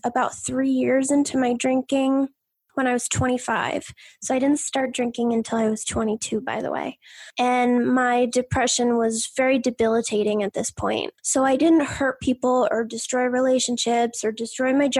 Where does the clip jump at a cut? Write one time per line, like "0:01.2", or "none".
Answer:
0:07.3
0:11.2